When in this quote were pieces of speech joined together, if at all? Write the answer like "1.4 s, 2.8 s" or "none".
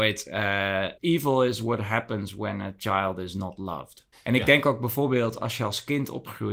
1.0 s, 4.1 s